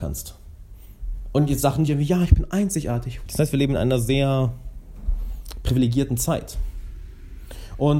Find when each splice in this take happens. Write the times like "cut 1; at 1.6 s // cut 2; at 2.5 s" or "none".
cut 1; at 3.3 s